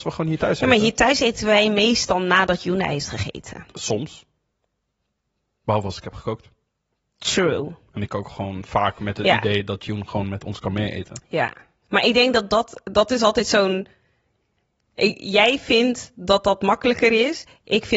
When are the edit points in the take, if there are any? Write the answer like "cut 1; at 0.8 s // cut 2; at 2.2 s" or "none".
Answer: none

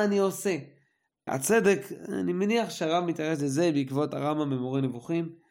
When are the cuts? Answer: cut 1; at 1.3 s

